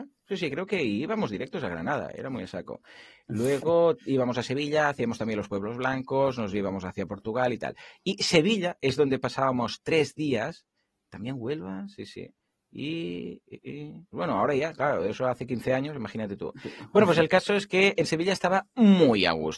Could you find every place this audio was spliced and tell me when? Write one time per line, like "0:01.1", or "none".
0:14.1